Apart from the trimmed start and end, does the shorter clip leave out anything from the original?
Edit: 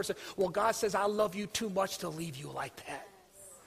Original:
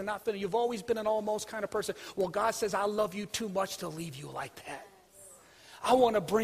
no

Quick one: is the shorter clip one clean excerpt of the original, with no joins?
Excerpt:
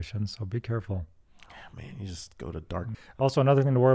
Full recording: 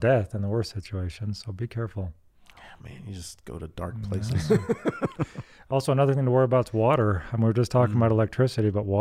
no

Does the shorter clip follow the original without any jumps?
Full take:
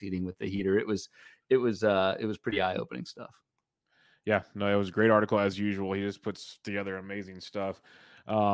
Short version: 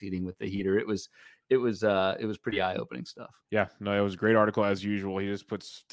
no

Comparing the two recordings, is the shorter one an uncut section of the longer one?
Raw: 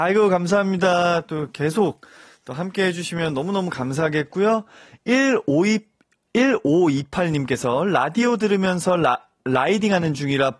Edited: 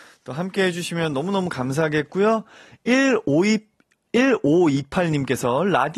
yes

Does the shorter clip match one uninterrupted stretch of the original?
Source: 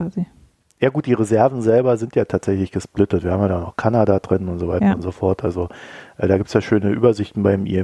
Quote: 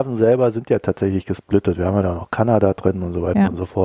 yes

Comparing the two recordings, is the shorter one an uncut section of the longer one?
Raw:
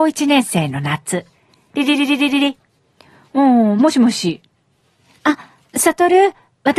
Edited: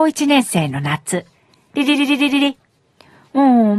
yes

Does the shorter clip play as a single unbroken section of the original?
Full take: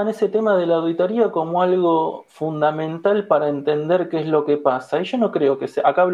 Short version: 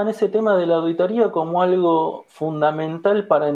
yes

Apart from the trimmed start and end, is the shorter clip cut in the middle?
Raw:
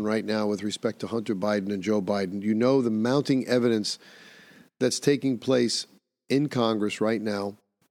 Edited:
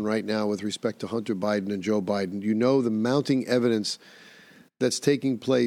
no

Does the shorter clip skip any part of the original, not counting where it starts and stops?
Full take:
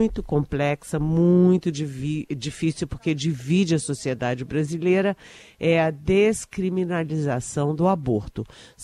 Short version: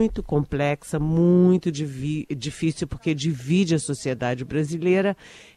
no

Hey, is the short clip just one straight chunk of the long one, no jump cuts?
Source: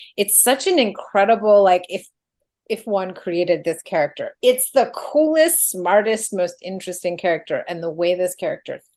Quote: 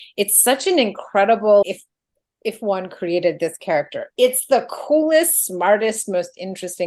no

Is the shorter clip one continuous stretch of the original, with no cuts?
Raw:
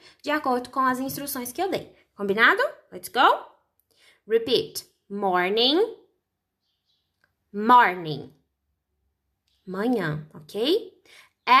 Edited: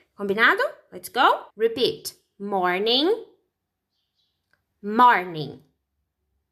no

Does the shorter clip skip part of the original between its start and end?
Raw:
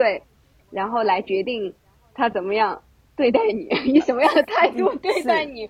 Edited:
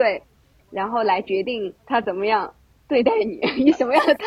yes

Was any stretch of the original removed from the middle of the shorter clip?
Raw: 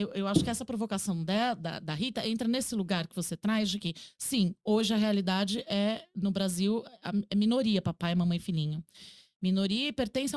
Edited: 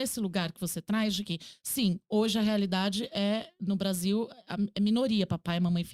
no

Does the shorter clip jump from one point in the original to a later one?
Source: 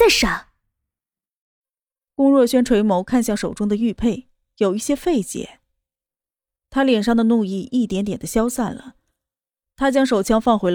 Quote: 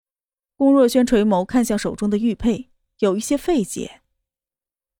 no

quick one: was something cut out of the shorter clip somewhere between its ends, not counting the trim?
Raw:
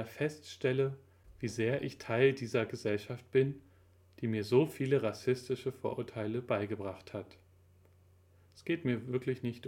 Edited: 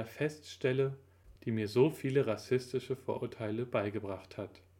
yes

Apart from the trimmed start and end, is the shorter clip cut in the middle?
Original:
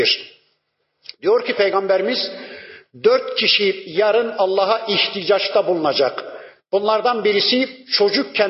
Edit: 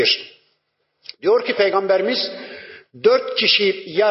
no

